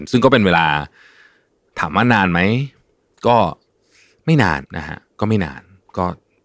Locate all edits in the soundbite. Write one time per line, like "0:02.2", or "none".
0:04.6